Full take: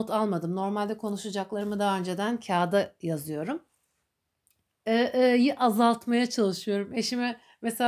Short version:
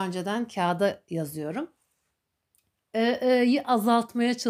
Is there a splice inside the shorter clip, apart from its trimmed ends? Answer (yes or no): no